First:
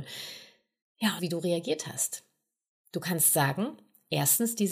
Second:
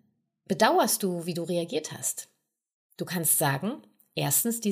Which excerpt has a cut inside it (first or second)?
first